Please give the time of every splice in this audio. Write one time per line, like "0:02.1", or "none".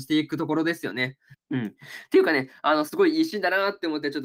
0:01.3